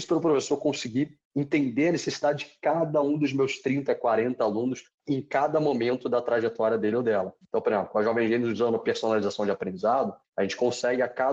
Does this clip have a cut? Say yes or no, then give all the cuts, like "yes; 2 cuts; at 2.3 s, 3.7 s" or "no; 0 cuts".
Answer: no; 0 cuts